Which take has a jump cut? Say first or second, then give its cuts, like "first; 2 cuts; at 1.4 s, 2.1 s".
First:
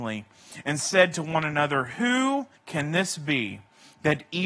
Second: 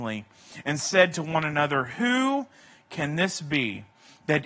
first; 1 cut; at 2.6 s